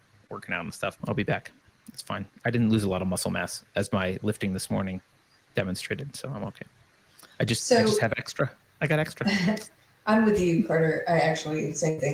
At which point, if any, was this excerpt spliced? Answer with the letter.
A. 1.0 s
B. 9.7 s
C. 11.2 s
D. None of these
A